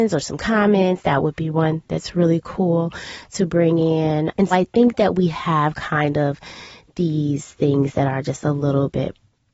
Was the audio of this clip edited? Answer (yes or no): yes